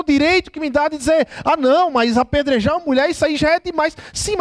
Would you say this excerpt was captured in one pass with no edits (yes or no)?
yes